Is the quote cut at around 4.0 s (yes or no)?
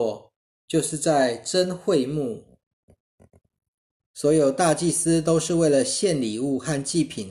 yes